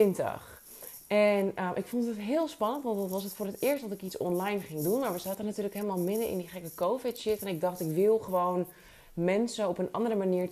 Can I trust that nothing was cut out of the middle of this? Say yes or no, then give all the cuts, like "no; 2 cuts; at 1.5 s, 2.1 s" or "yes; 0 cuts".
yes; 0 cuts